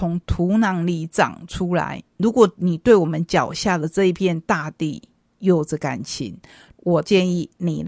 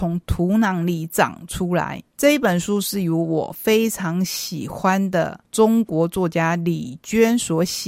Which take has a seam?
first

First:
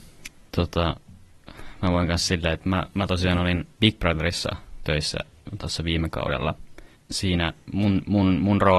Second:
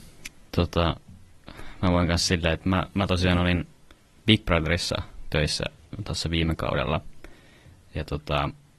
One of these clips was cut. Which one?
first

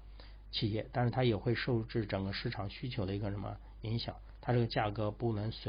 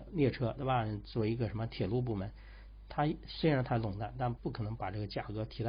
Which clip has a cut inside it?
second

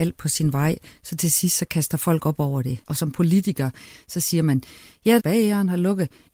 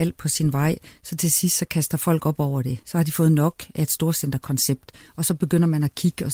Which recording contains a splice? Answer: first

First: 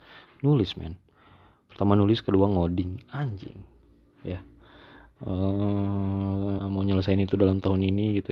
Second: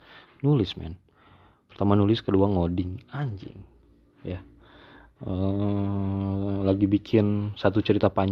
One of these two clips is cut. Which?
first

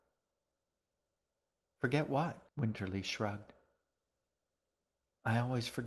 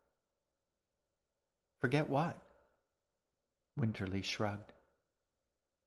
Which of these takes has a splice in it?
first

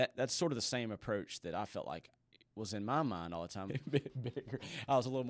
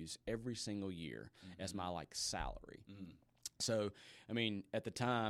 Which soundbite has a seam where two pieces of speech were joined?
first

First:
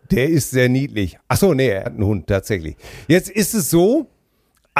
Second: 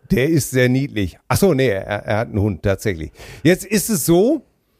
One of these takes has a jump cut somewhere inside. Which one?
first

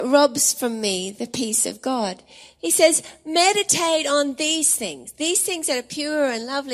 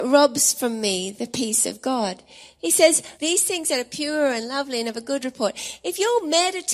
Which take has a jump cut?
second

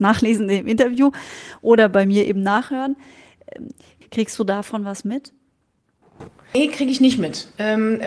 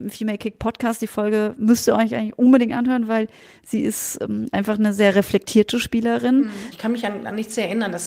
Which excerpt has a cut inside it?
second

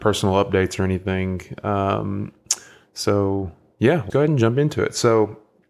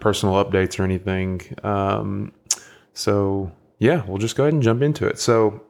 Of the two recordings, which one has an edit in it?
first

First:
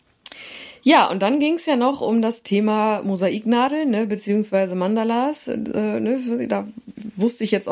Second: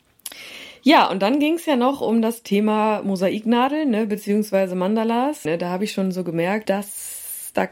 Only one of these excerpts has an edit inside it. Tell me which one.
second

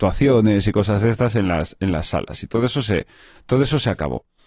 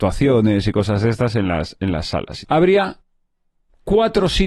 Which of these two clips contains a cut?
second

